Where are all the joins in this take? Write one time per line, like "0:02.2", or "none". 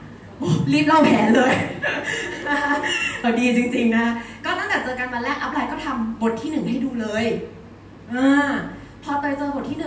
0:03.2